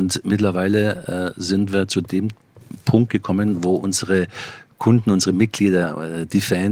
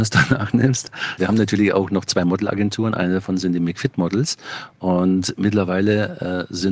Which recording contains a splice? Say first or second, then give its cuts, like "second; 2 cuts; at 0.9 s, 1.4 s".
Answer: second; 1 cut; at 1.2 s